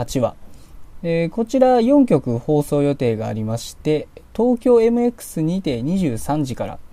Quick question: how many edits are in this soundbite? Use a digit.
0